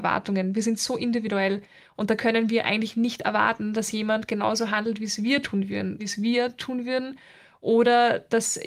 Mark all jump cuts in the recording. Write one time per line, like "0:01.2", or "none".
0:06.0